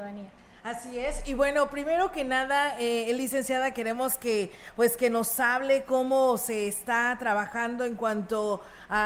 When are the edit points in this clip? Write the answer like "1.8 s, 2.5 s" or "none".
none